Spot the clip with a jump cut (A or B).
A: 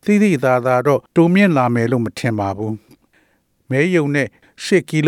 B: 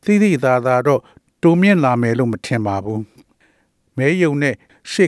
A